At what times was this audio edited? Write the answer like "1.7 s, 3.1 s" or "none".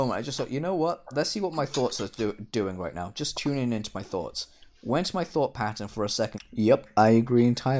6.3 s